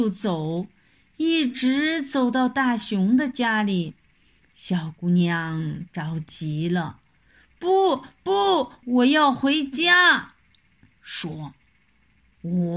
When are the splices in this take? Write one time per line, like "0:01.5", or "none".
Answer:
0:08.8
0:10.9